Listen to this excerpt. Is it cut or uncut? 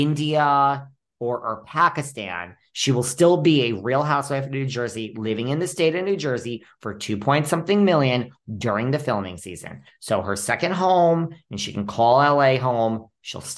uncut